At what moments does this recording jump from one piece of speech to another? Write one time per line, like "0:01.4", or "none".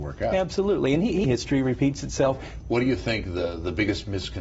0:01.2
0:02.6